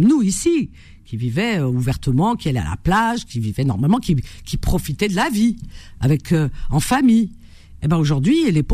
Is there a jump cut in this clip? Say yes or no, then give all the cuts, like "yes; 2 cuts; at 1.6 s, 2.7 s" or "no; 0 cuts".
no; 0 cuts